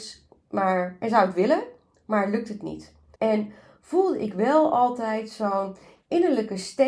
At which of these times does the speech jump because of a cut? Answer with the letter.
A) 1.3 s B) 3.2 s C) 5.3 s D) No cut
B